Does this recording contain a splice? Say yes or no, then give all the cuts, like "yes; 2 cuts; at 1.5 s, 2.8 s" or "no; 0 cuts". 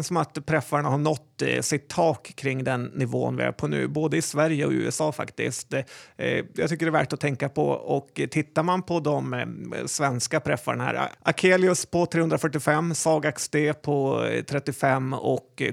no; 0 cuts